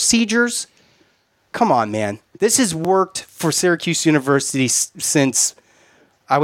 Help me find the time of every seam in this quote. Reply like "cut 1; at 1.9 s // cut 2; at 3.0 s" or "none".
none